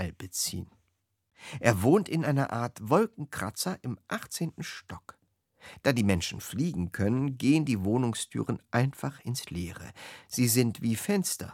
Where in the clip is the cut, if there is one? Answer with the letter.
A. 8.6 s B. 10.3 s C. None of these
C